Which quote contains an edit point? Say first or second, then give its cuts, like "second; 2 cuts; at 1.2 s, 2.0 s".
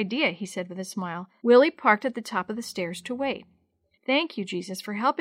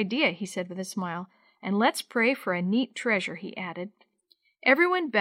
first; 2 cuts; at 1.4 s, 3.9 s